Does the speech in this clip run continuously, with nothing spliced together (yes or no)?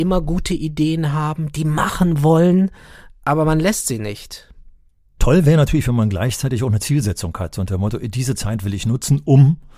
no